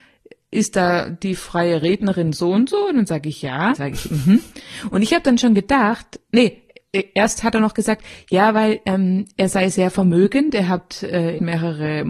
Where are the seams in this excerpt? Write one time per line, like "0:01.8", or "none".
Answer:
0:03.7